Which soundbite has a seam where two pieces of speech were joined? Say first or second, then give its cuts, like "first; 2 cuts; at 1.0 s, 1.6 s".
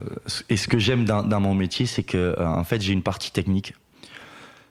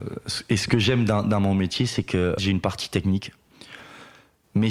second; 1 cut; at 2.4 s